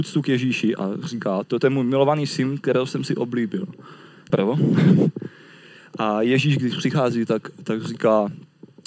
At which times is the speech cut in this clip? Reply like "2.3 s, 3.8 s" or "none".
4.3 s